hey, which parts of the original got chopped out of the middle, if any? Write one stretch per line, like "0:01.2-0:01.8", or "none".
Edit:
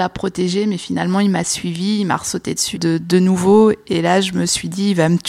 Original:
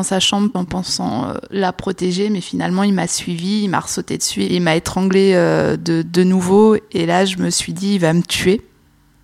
0:04.4-0:05.8